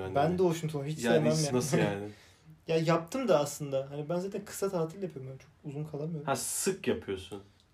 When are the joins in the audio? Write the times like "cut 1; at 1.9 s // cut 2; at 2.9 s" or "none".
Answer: cut 1; at 1.5 s